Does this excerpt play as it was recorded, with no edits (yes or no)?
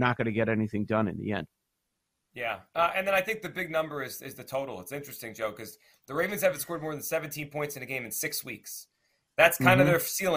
yes